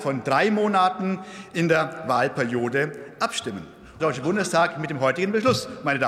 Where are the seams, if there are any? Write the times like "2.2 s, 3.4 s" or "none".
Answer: 4.0 s